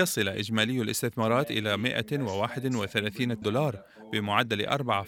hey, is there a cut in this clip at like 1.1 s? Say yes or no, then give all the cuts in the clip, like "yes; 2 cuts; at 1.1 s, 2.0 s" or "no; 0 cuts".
no; 1 cut; at 3.4 s